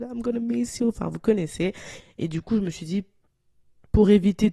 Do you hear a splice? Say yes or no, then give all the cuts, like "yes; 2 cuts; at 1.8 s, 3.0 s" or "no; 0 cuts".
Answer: yes; 1 cut; at 2.0 s